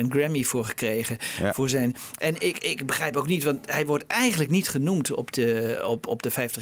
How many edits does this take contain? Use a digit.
0